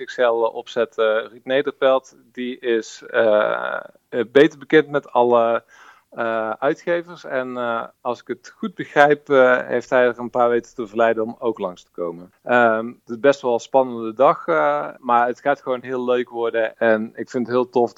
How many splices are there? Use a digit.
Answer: 3